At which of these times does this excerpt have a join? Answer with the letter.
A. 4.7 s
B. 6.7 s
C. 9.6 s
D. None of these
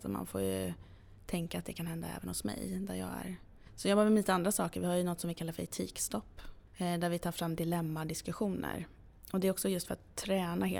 B